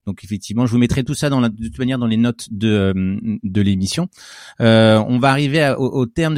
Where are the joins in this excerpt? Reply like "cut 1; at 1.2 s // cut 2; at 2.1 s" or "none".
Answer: none